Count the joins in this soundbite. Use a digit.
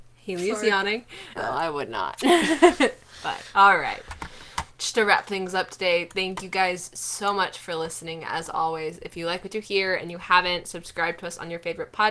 1